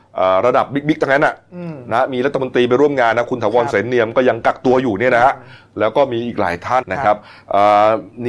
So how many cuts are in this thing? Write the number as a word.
one